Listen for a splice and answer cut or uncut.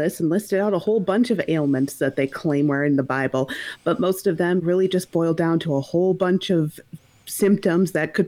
cut